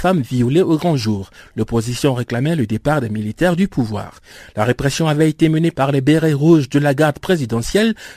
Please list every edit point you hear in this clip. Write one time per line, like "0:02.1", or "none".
none